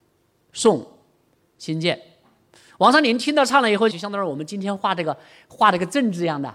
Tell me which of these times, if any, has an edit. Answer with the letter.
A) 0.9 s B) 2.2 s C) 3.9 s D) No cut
C